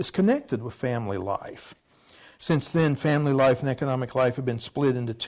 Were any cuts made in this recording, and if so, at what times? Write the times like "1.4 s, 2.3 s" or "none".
none